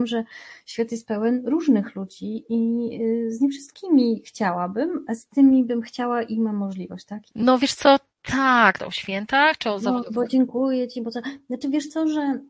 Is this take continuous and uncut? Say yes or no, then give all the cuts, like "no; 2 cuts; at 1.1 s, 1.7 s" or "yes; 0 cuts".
no; 2 cuts; at 7.3 s, 8.8 s